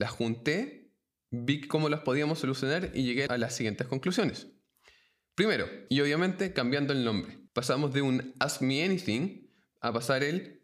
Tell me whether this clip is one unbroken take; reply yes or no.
no